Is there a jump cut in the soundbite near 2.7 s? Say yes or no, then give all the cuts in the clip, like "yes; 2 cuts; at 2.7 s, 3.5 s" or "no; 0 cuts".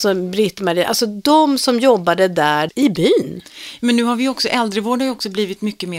yes; 1 cut; at 2.7 s